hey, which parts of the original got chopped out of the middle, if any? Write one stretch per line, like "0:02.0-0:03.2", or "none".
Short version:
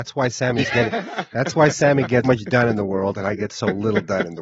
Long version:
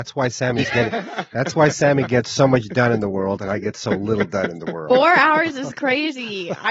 0:02.2-0:02.5